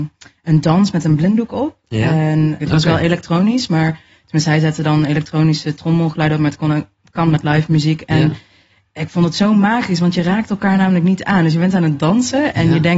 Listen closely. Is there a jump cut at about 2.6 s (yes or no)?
yes